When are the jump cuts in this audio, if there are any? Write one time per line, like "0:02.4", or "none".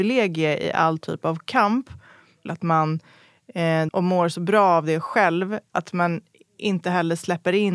0:02.5
0:03.9